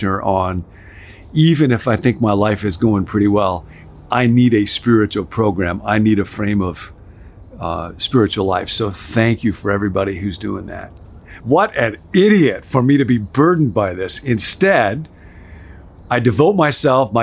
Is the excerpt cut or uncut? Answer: cut